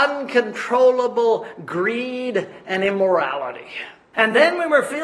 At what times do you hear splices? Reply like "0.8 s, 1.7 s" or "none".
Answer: 4.1 s